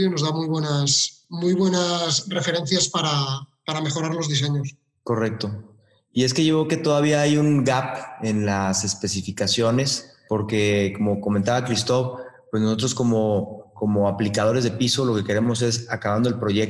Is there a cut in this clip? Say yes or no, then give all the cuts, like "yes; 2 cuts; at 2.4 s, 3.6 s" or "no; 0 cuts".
no; 0 cuts